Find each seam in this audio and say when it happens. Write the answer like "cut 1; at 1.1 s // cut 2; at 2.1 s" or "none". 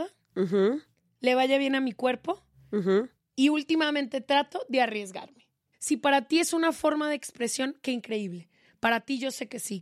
cut 1; at 5.7 s